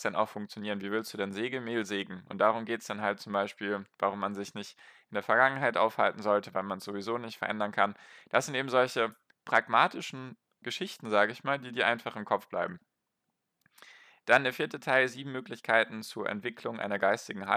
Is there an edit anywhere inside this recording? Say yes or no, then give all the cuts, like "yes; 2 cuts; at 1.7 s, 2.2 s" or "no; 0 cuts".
no; 0 cuts